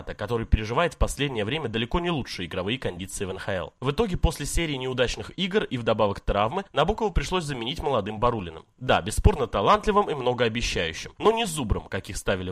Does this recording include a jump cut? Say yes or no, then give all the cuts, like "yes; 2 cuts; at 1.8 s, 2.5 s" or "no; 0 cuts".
no; 0 cuts